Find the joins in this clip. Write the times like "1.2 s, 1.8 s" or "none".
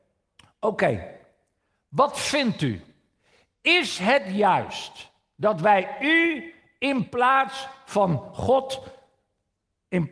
none